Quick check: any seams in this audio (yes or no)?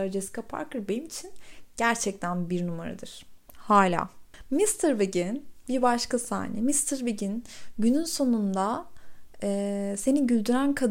no